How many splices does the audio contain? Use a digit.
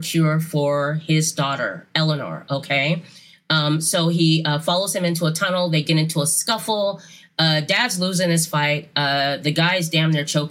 0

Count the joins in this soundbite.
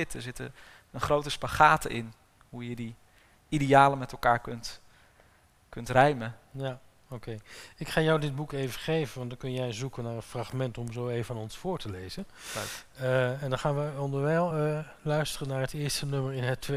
0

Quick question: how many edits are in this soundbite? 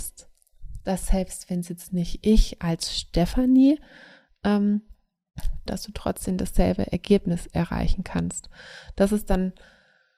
1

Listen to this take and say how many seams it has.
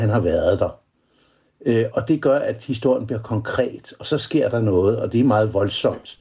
1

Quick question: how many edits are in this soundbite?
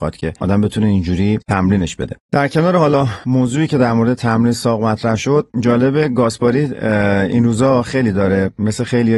1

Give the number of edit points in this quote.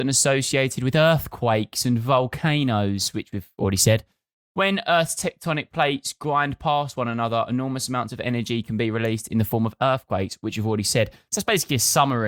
0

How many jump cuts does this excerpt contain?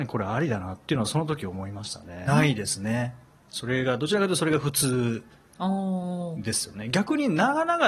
1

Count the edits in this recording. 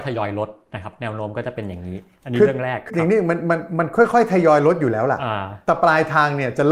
1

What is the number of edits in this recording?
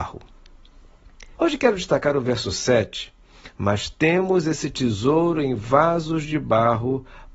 1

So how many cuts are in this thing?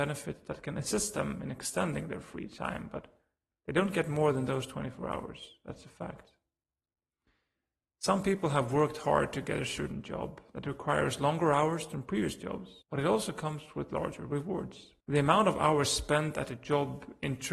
2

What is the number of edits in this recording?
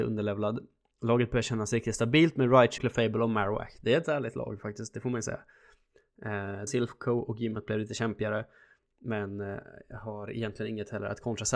2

